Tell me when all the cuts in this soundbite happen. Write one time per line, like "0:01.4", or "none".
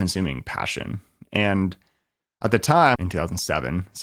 0:03.0